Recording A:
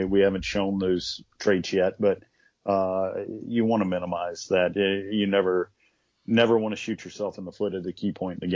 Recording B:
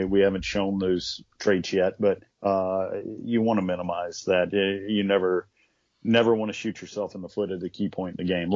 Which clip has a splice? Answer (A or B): B